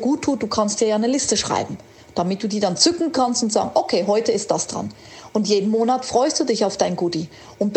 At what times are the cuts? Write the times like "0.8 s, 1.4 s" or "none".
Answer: none